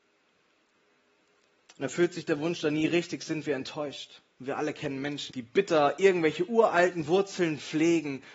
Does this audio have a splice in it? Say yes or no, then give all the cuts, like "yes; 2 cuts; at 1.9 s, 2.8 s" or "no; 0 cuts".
yes; 1 cut; at 5.3 s